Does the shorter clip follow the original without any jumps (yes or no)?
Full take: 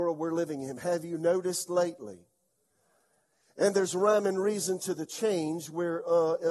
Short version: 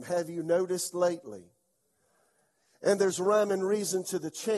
yes